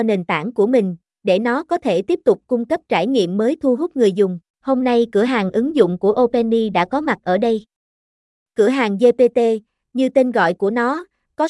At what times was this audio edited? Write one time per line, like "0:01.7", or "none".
0:04.5